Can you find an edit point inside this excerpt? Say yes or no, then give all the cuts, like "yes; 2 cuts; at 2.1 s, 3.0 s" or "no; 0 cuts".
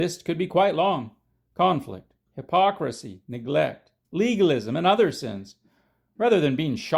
yes; 2 cuts; at 2.3 s, 4.0 s